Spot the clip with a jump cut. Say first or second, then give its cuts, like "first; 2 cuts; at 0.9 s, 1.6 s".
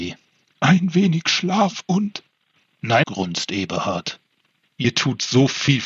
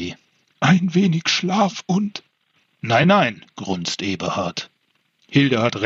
first; 2 cuts; at 3.0 s, 4.6 s